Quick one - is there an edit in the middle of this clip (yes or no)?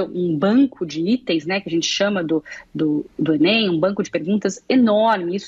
no